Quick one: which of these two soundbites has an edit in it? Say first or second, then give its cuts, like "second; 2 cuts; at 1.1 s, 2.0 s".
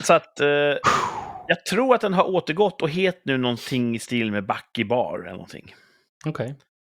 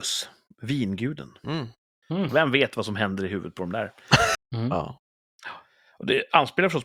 second; 2 cuts; at 2.3 s, 4.3 s